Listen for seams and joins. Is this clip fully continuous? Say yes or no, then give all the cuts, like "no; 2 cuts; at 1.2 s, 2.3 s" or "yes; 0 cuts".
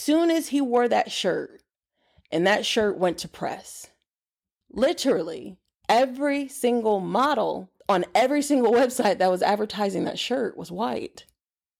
no; 2 cuts; at 4.6 s, 7.8 s